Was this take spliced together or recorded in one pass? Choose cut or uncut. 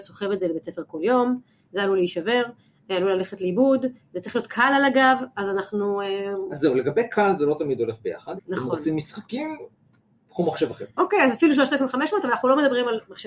cut